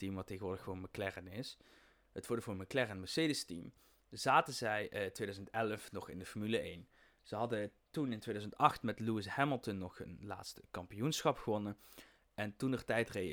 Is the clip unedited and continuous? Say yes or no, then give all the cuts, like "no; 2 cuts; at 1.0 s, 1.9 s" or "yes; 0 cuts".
yes; 0 cuts